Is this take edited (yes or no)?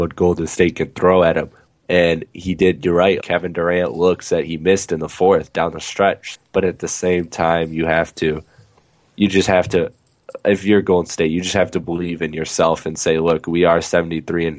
yes